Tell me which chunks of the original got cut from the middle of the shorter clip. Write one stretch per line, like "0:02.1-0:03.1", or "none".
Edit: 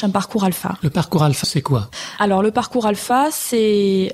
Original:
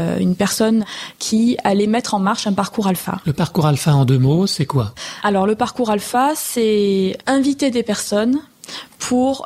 0:03.9-0:04.5